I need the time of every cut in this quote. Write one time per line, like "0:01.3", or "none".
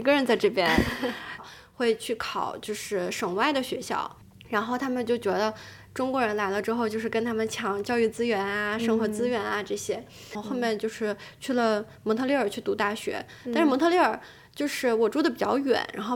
0:01.4